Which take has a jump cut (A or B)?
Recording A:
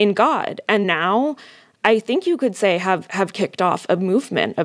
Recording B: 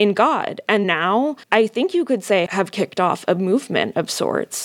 B